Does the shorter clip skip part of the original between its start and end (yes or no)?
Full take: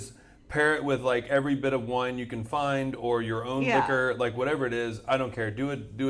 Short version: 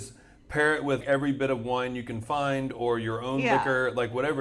yes